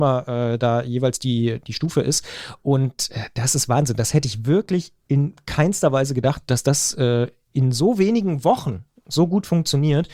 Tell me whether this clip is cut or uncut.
uncut